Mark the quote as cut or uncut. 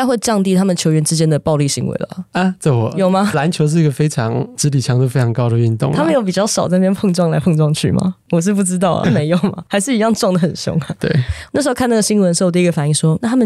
cut